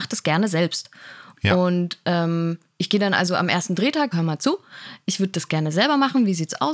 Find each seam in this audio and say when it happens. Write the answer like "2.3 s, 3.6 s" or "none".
4.1 s

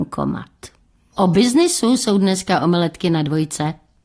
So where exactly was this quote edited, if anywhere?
1.1 s

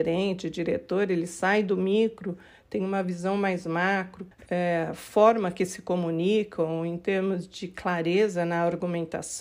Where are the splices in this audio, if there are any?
4.3 s

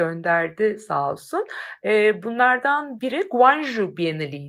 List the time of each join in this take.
3.0 s

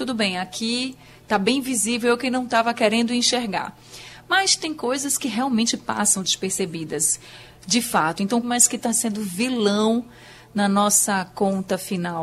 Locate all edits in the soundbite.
8.4 s

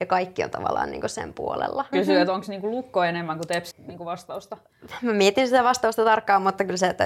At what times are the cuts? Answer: 1.9 s, 3.7 s

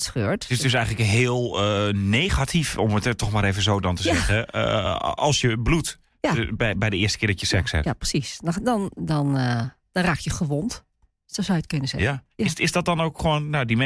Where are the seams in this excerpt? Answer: 9.0 s

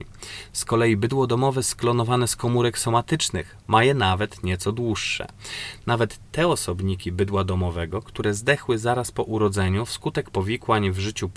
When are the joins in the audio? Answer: none

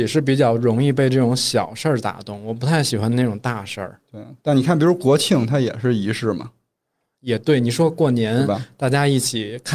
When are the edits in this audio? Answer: none

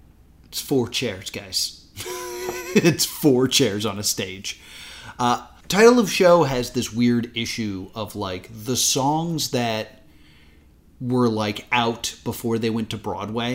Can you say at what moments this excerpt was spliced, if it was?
5.6 s

